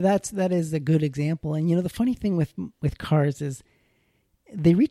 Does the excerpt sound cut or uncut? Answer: uncut